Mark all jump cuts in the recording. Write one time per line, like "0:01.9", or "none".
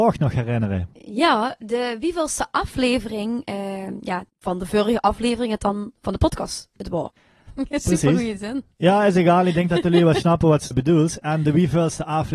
0:08.7
0:10.7